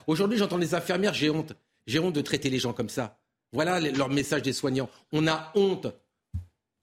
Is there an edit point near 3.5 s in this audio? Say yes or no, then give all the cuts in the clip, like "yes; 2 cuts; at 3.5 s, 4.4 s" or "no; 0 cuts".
no; 0 cuts